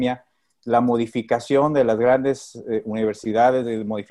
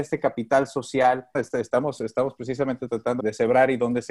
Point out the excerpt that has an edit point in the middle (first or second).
second